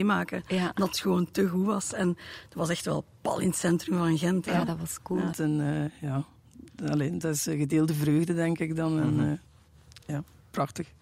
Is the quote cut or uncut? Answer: cut